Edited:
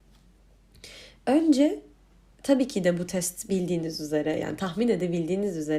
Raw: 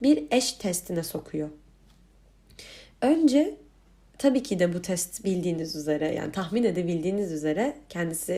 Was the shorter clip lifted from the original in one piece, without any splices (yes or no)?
yes